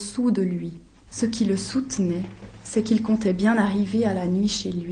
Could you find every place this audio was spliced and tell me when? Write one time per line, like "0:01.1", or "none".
0:01.1

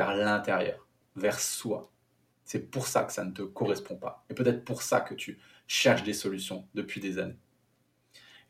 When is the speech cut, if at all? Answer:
0:02.3

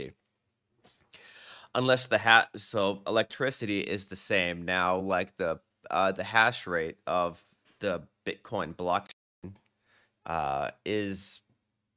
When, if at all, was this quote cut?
none

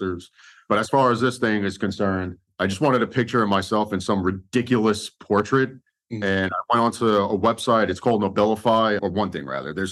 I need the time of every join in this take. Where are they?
0:09.0

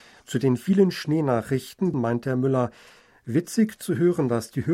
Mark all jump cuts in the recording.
0:01.9

